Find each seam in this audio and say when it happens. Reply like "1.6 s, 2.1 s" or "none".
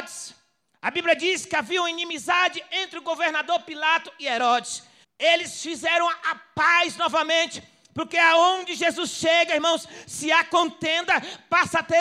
5.0 s